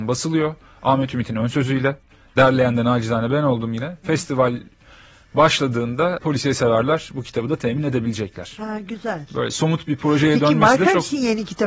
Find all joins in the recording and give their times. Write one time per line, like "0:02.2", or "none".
none